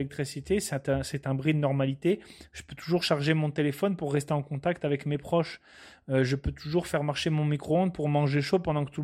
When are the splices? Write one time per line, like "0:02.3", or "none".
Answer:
none